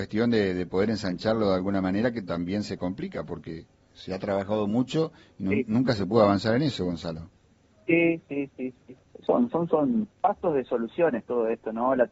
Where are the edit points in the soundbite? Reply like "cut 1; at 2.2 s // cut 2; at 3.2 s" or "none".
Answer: cut 1; at 9.0 s // cut 2; at 10.1 s